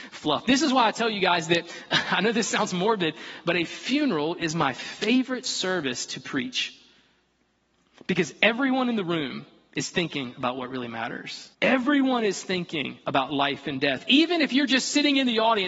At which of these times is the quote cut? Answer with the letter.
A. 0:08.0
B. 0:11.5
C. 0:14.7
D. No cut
B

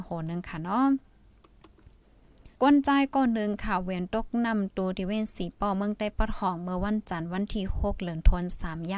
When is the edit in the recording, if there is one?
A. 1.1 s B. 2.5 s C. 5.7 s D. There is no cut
B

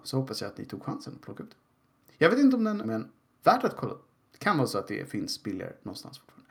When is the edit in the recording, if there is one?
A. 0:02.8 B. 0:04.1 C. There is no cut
A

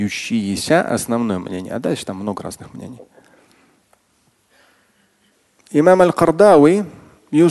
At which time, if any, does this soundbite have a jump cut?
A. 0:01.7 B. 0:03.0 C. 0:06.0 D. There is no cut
D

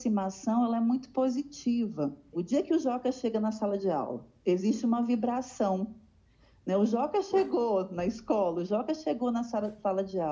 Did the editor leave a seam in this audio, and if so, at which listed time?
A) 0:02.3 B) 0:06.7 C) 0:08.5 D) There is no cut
A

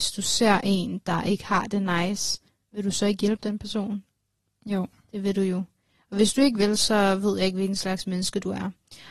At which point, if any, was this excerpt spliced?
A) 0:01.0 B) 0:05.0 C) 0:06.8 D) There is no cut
D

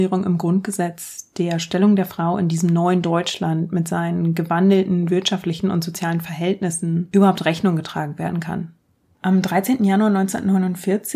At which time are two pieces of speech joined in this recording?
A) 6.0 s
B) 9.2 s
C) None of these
C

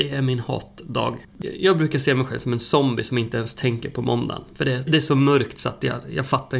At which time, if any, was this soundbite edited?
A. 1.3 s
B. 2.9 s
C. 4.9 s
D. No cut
C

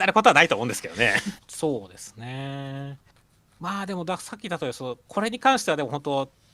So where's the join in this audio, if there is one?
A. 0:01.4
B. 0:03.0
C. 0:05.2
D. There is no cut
A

